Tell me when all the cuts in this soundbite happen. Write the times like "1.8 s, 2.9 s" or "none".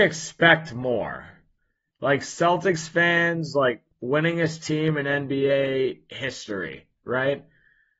1.9 s, 3.9 s